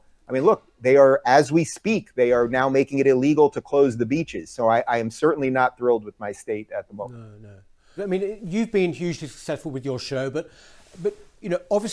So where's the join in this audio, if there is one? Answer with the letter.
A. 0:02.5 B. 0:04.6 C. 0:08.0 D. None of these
C